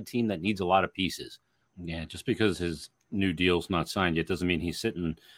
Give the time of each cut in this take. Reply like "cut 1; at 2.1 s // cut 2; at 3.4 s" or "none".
cut 1; at 1.7 s